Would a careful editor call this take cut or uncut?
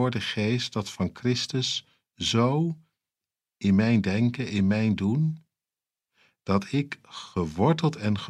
uncut